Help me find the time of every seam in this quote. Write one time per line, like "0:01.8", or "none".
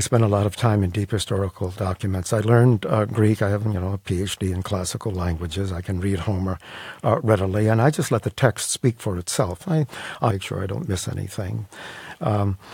0:10.3